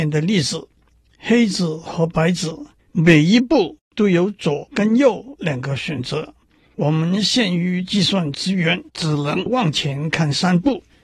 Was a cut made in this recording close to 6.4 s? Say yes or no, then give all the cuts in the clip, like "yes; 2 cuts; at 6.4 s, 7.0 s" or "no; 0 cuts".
no; 0 cuts